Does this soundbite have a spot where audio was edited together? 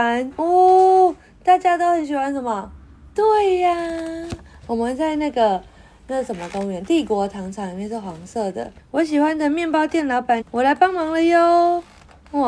yes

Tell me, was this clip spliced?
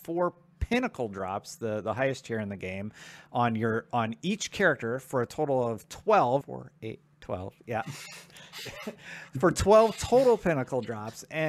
yes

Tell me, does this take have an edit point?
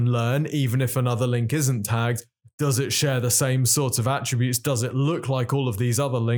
no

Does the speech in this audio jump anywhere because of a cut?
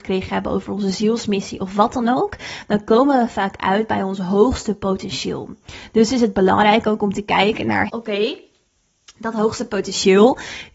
yes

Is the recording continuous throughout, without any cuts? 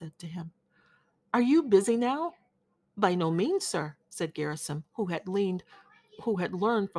yes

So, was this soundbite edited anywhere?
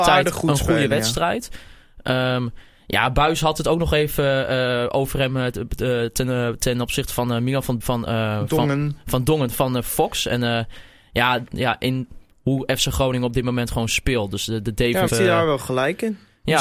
yes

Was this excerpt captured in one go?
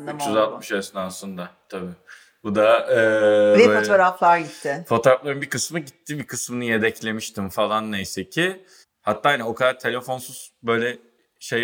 no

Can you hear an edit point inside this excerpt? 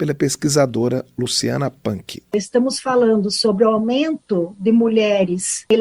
no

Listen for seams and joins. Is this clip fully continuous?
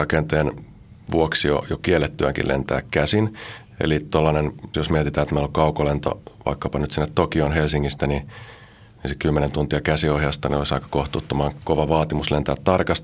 no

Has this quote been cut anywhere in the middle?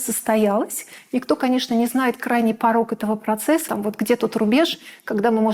yes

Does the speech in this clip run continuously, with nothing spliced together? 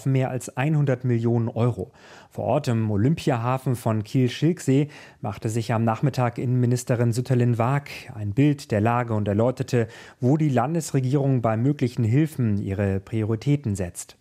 yes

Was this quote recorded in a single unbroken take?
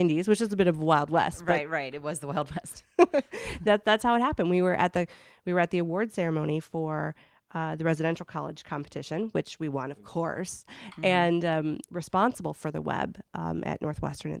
no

